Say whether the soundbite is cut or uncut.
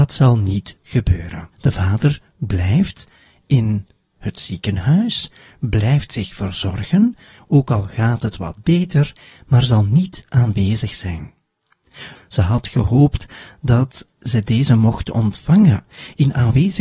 cut